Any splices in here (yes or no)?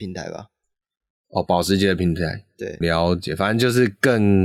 yes